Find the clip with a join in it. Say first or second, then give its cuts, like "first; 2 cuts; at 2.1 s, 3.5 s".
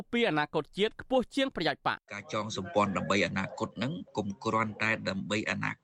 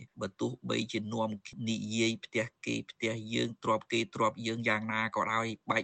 first; 1 cut; at 2.0 s